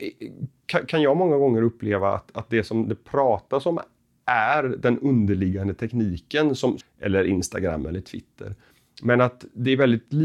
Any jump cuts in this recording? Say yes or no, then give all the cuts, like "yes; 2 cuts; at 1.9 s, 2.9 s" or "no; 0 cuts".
yes; 1 cut; at 6.8 s